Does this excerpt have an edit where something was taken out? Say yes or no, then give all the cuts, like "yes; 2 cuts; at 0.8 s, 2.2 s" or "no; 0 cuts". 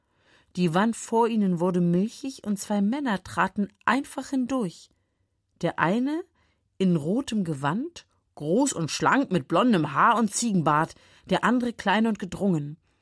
no; 0 cuts